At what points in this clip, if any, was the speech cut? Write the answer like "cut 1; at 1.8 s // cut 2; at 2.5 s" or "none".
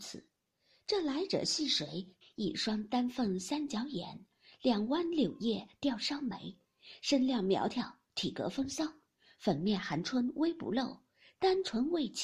cut 1; at 2.2 s